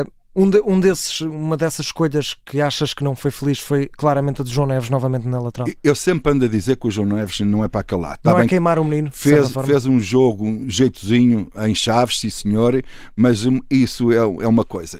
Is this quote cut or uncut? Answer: uncut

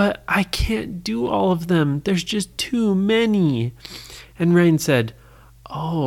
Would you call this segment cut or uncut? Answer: uncut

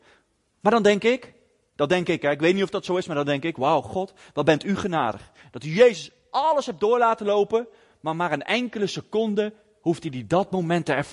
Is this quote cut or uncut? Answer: uncut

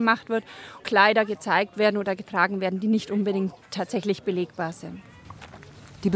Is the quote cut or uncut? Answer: uncut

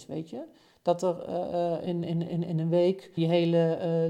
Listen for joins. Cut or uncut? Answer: cut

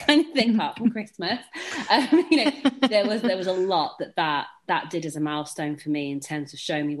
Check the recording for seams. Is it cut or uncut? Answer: uncut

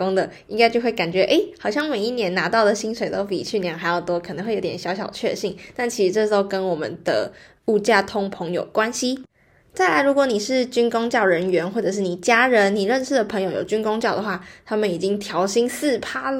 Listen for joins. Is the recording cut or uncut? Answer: uncut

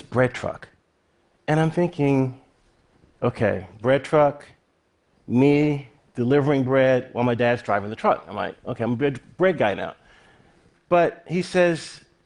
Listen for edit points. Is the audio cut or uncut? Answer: uncut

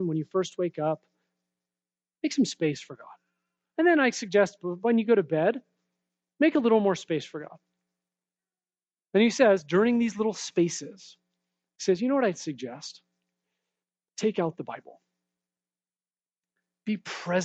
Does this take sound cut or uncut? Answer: uncut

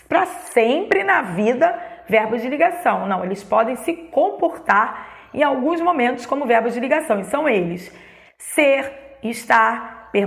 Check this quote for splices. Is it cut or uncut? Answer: uncut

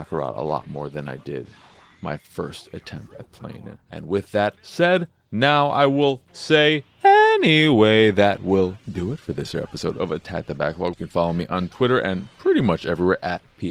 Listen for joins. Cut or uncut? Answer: cut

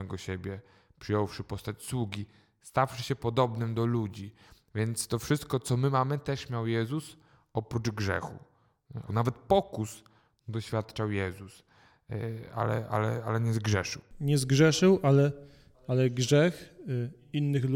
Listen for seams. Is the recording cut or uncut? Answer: cut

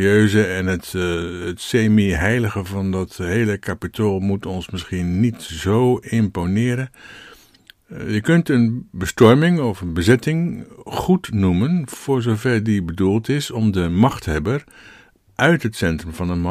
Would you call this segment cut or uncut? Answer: uncut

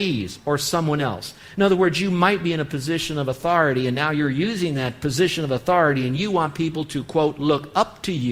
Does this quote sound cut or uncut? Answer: uncut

